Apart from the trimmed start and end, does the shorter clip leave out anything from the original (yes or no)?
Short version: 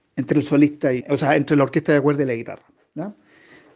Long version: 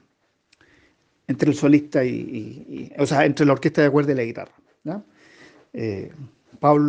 yes